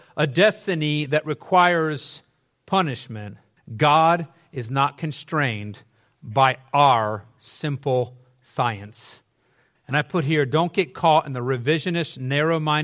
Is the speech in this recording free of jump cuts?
no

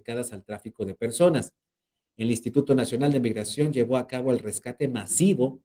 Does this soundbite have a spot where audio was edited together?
no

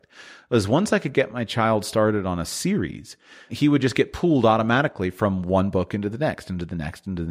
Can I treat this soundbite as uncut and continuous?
no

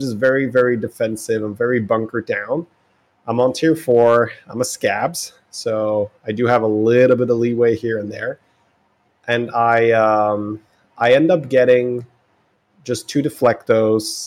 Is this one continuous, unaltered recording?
yes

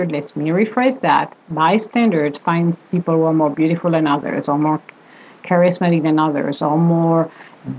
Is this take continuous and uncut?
yes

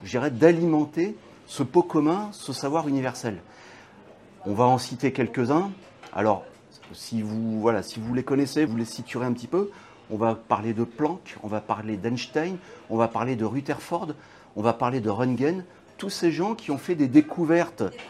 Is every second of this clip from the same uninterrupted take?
no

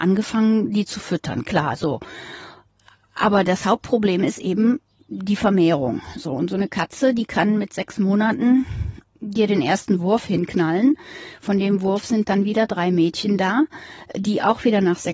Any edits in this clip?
no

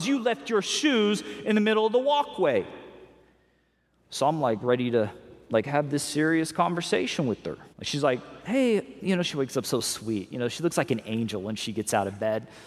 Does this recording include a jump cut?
yes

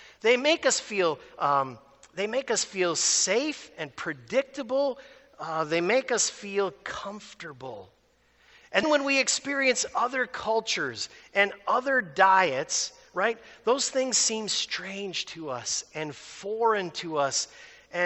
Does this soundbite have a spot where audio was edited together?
yes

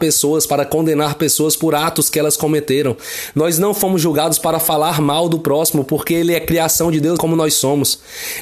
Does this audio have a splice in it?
yes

